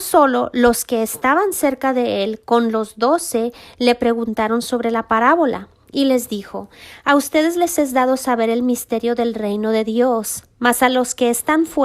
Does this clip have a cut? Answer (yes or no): no